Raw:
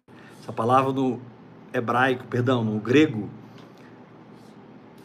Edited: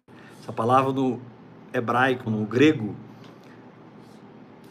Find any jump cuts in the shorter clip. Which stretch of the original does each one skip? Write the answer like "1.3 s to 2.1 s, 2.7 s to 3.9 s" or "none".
2.3 s to 2.6 s